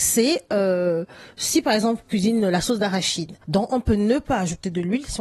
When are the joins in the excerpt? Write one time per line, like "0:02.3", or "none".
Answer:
0:03.4